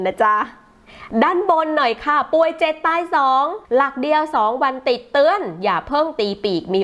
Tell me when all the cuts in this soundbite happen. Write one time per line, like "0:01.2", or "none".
0:03.6

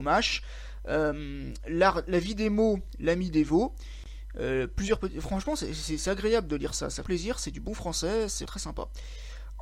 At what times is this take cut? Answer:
0:07.0
0:08.5

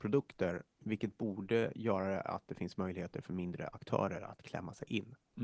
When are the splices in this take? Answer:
none

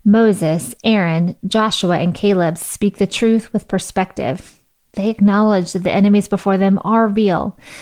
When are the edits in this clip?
none

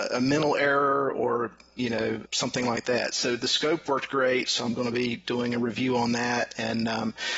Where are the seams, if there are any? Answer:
0:02.2

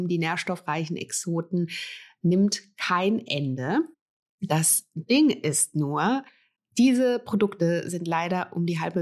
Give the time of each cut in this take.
none

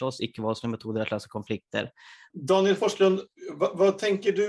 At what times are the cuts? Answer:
0:02.3

